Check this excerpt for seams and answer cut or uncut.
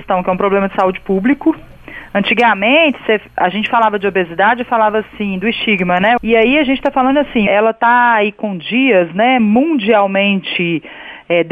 cut